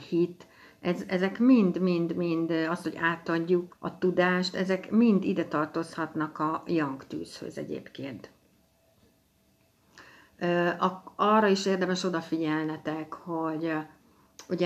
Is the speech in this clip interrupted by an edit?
yes; 1 cut; at 3.7 s

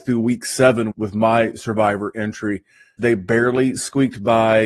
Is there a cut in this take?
yes; 2 cuts; at 0.9 s, 3.0 s

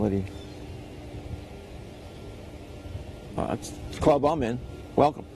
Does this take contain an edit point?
yes; 1 cut; at 3.4 s

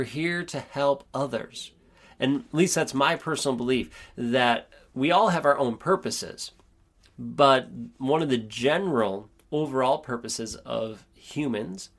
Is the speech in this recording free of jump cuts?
yes; 0 cuts

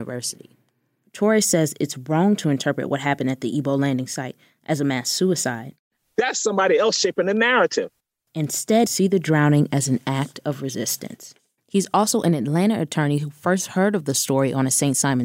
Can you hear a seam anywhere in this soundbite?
yes; 2 cuts; at 8.9 s, 11.6 s

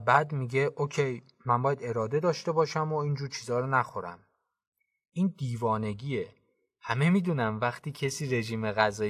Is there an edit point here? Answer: no; 0 cuts

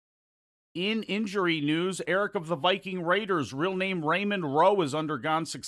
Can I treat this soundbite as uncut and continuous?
yes; 0 cuts

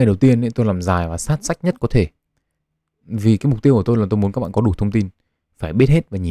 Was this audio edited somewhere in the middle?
no; 0 cuts

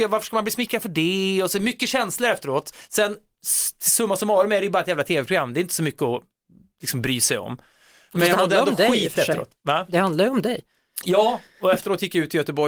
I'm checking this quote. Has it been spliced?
no; 0 cuts

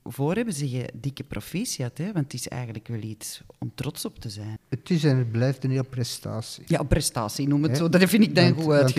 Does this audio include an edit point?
yes; 1 cut; at 4.6 s

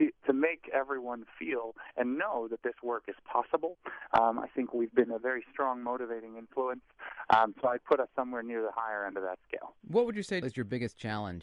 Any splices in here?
yes; 1 cut; at 10.4 s

